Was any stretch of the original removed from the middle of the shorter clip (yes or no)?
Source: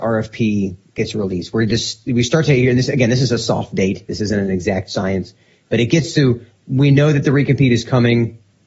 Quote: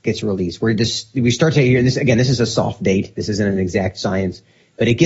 no